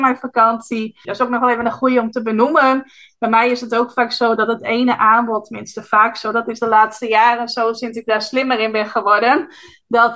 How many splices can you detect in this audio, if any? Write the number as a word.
one